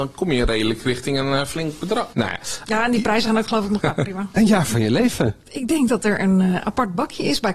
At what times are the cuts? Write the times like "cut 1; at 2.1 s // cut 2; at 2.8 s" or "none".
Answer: cut 1; at 3.8 s